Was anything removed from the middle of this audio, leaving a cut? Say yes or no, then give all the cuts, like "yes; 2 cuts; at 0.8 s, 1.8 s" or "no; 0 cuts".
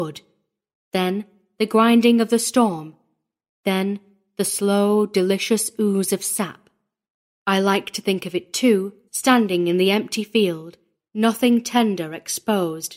yes; 2 cuts; at 9.1 s, 10.9 s